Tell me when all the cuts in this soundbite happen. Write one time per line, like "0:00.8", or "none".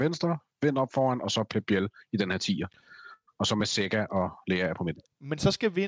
none